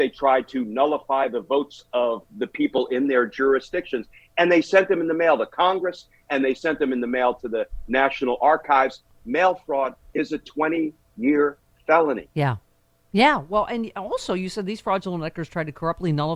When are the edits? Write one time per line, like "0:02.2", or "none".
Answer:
none